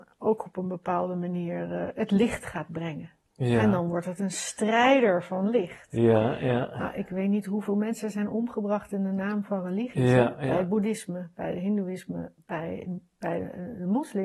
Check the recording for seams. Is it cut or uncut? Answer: uncut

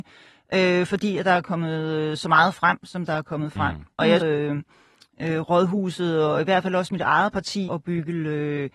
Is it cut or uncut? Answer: cut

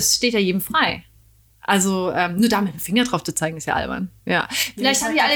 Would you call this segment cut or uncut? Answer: cut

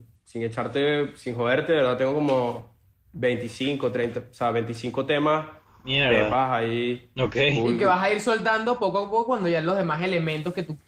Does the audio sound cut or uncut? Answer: uncut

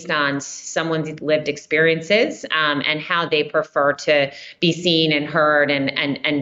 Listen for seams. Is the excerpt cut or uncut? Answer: uncut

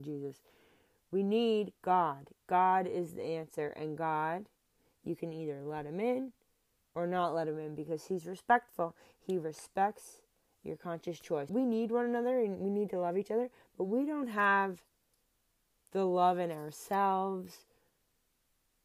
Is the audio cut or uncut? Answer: cut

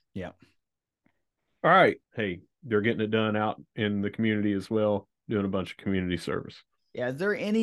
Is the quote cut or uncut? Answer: cut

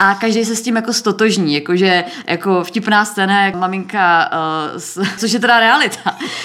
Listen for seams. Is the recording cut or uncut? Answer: cut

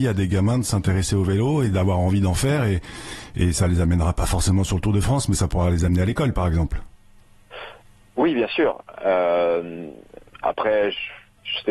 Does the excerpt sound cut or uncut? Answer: uncut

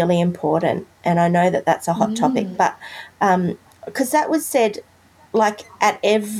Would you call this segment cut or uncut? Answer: uncut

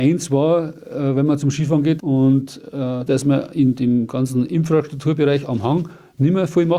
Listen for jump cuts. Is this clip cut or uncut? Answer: cut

